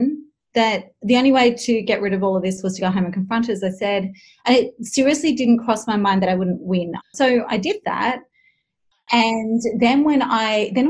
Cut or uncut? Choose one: cut